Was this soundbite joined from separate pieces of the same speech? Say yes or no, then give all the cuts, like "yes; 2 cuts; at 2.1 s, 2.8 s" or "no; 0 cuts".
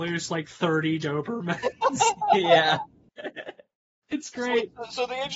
no; 0 cuts